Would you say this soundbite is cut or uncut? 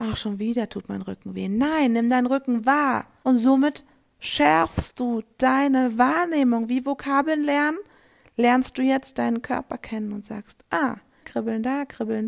cut